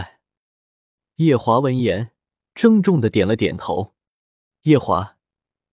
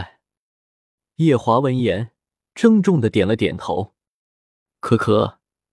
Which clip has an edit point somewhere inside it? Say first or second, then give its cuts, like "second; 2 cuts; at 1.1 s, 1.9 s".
first; 1 cut; at 4.5 s